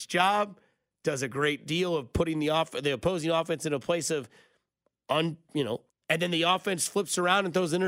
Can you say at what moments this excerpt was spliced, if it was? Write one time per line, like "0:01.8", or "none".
0:05.9